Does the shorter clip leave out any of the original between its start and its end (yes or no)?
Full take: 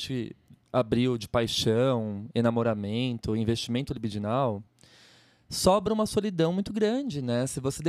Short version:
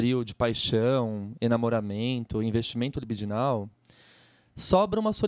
no